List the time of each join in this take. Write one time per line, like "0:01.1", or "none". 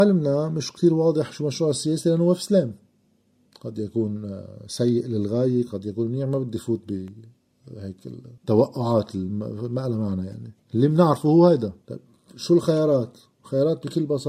0:08.4
0:10.6
0:11.8